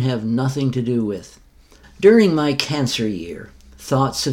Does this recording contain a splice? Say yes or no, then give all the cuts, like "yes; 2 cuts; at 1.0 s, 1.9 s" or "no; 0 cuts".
yes; 1 cut; at 1.8 s